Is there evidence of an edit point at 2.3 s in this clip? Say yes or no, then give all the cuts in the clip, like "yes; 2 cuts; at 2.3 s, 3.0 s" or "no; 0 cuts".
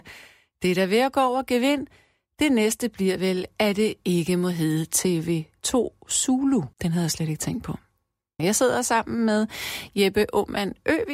no; 2 cuts; at 6.7 s, 8.4 s